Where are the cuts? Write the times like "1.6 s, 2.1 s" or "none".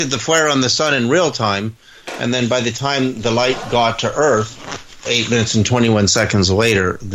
5.0 s